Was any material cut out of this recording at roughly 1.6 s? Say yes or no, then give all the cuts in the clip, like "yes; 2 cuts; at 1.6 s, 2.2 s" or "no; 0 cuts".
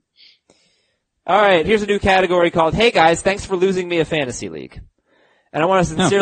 yes; 1 cut; at 1.6 s